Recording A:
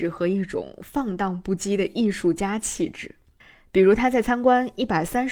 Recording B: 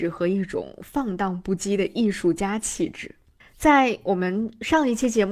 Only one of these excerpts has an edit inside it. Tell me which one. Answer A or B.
B